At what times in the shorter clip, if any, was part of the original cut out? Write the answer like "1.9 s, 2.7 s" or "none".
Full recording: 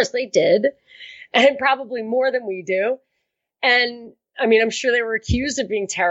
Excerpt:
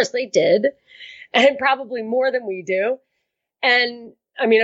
none